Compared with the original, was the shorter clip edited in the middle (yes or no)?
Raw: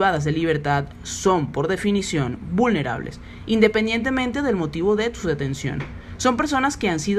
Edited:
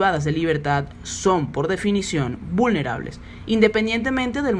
no